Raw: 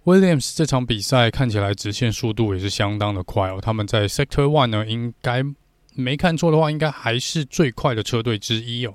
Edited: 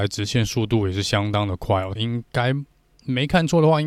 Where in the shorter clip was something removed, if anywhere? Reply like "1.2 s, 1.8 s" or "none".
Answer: 2.0 s